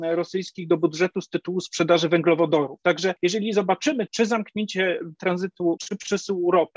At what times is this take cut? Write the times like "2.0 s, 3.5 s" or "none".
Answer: 2.8 s, 4.1 s, 5.8 s